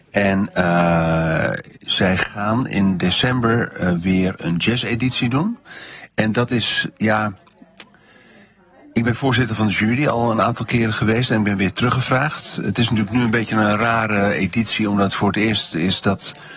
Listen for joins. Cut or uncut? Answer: uncut